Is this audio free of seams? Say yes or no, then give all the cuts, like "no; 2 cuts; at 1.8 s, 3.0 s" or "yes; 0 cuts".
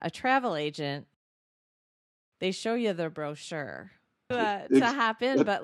no; 1 cut; at 4.3 s